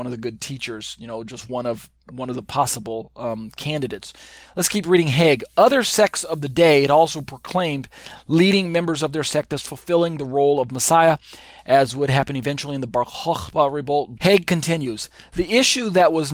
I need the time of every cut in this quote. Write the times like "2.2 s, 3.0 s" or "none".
14.2 s